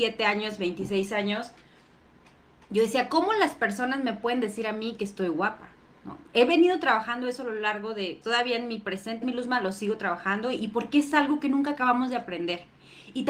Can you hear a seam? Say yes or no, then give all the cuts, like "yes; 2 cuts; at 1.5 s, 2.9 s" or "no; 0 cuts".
yes; 2 cuts; at 8.2 s, 9.2 s